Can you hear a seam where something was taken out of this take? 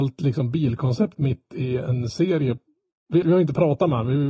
yes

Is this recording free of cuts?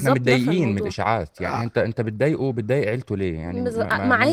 yes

